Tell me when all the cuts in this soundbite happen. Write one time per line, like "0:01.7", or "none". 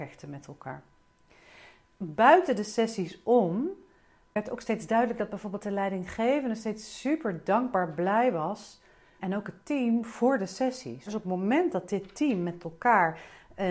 0:09.2
0:11.1